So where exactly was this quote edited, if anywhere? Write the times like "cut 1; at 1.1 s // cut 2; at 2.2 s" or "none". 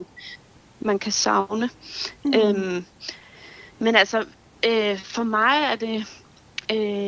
cut 1; at 3.7 s